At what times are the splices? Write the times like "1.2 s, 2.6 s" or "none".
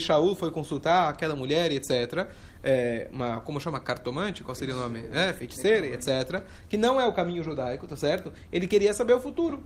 none